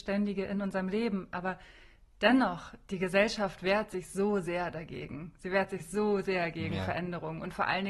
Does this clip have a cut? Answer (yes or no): no